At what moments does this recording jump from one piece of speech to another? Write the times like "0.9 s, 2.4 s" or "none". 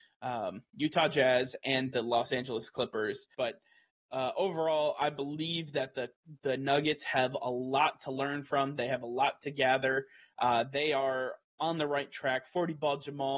3.3 s